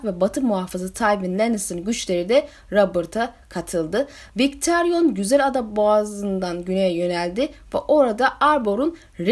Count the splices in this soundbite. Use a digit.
0